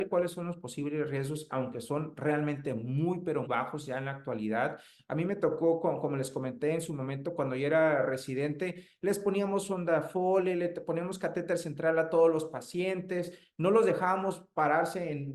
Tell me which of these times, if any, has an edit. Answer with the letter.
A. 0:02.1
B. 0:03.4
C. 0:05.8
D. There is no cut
B